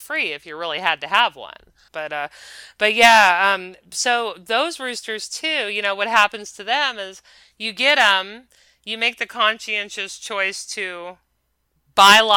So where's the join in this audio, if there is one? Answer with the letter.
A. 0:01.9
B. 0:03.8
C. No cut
A